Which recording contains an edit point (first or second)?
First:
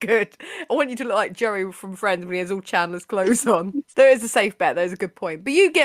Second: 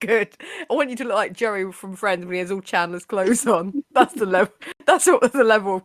first